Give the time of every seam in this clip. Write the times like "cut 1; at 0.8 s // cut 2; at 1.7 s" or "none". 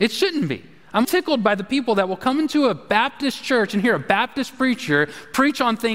cut 1; at 1.0 s